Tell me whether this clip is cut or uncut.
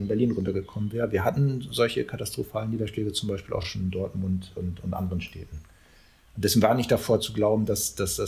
uncut